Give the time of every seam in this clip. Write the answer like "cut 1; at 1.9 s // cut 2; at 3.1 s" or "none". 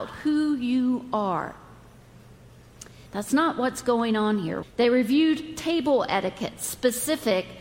cut 1; at 3.1 s // cut 2; at 4.6 s